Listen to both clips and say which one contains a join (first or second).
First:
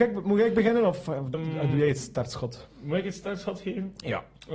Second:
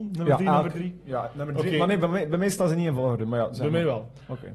first